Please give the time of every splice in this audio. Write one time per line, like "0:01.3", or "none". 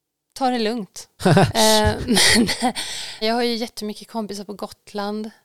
0:01.2
0:03.2